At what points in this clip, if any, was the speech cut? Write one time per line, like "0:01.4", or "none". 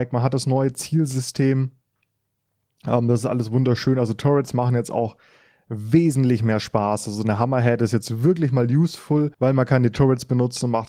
0:09.3